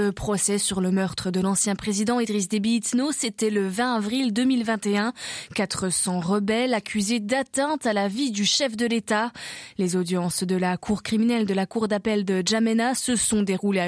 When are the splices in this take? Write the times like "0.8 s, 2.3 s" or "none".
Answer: none